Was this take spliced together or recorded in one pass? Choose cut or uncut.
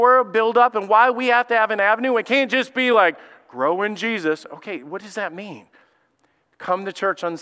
uncut